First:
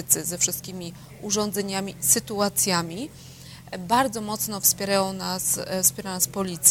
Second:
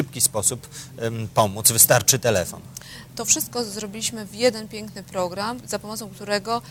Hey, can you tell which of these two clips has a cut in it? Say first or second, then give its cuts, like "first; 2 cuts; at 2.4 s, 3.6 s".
second; 2 cuts; at 3.1 s, 5.6 s